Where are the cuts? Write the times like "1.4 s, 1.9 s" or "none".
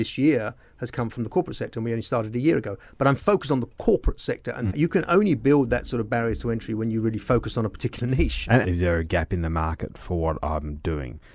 4.7 s, 8.6 s